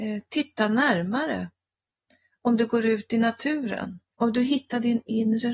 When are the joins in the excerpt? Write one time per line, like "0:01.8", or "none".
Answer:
0:04.1